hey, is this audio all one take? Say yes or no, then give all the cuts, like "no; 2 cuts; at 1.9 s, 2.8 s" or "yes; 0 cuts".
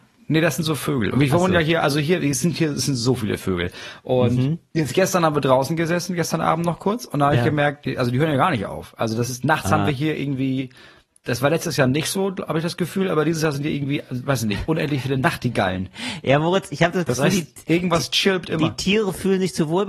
yes; 0 cuts